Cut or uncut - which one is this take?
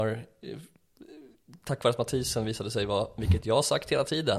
uncut